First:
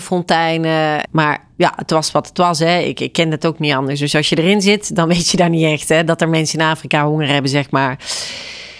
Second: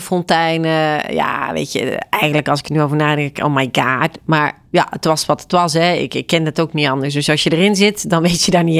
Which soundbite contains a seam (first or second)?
first